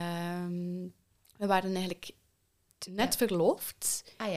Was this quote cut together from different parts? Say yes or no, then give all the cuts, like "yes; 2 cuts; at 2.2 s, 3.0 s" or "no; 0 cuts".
no; 0 cuts